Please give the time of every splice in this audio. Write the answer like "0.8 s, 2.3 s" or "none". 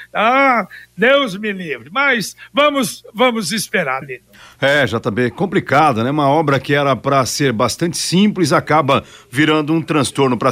4.0 s

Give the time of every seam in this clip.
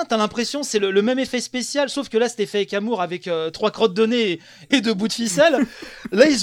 4.7 s

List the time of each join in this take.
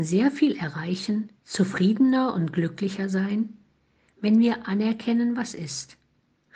1.4 s

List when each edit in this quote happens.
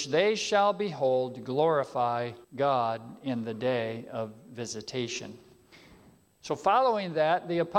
2.4 s

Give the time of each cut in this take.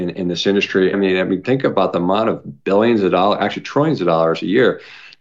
0.9 s

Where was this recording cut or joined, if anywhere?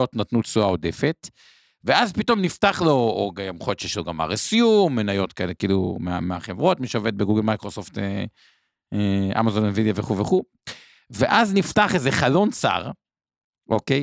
none

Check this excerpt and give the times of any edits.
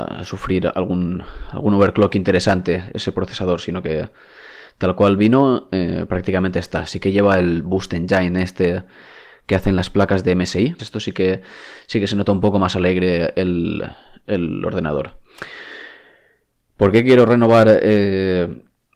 10.8 s

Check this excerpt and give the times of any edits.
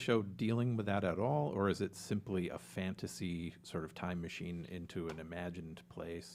none

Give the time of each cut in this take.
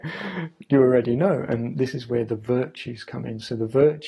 none

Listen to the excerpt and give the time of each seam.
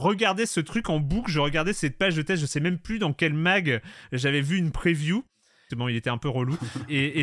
5.7 s

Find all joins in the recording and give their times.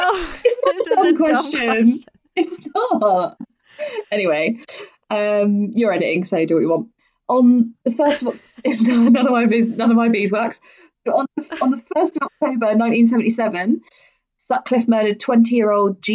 none

